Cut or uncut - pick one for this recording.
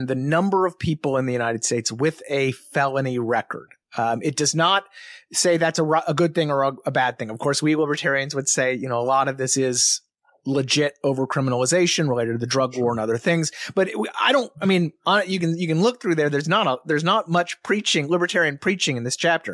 uncut